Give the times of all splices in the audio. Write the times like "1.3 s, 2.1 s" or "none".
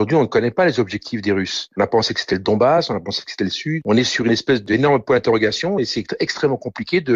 none